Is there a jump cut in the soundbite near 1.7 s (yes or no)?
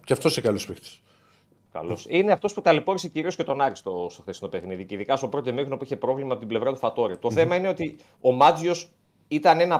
yes